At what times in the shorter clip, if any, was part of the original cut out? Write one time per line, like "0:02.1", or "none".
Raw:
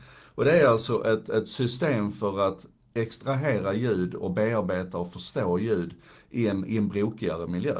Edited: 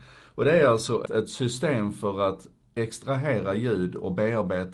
0:01.1